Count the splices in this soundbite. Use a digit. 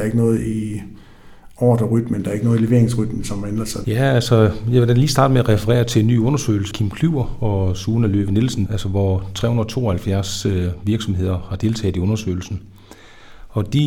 3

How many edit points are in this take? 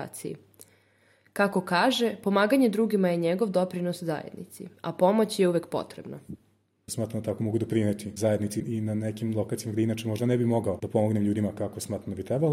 0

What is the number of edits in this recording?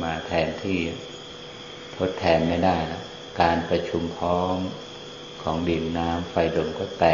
0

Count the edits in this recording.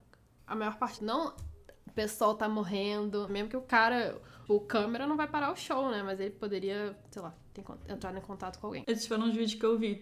3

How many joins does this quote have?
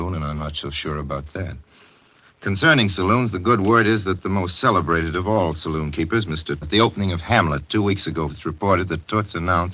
2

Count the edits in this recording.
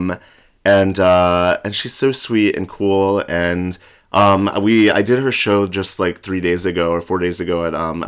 0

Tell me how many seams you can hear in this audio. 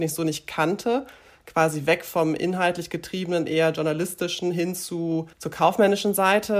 1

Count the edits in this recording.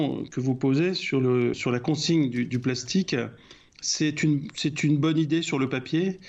1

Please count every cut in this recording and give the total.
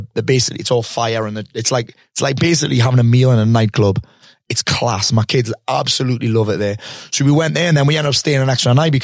0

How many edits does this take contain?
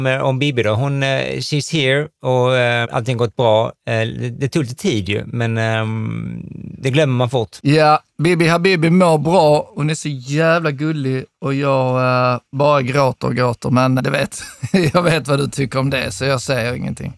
2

